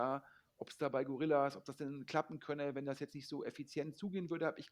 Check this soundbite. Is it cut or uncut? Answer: uncut